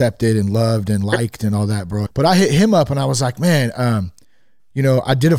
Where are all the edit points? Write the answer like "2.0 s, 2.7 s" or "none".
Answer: 2.1 s